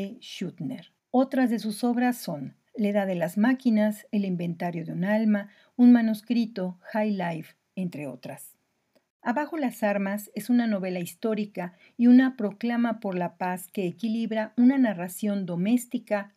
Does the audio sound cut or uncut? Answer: cut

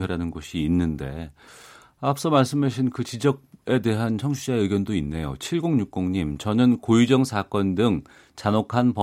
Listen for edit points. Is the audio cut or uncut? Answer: uncut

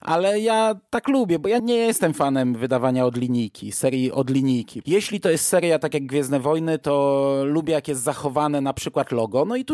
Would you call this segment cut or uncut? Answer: cut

